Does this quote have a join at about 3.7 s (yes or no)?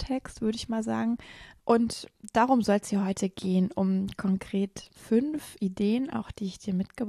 no